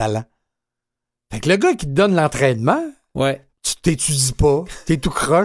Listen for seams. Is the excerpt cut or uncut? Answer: cut